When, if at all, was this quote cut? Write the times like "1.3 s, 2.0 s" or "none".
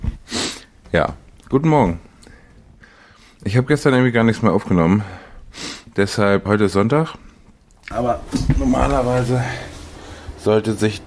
6.5 s, 7.9 s